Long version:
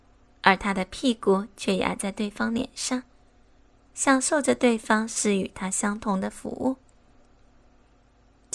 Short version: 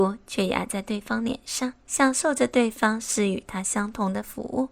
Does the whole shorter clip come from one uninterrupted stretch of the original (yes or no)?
no